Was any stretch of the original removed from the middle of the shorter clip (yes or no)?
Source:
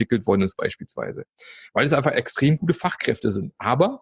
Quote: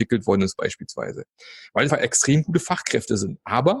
yes